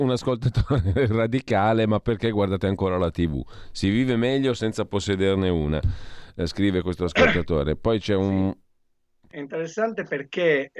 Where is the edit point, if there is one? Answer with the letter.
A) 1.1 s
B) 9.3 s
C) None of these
B